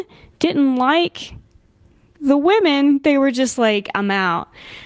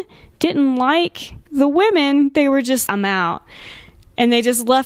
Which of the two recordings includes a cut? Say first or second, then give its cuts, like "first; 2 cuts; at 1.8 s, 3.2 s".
second; 2 cuts; at 1.4 s, 2.9 s